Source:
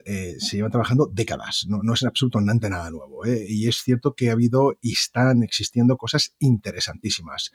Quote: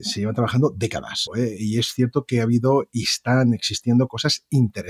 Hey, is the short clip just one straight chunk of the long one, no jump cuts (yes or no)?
no